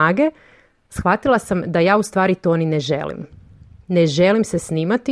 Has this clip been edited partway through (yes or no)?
no